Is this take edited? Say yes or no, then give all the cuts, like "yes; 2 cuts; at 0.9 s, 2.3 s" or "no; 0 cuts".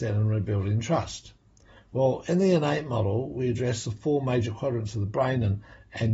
no; 0 cuts